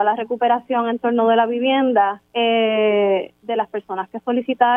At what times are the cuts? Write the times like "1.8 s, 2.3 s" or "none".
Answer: 2.3 s, 3.4 s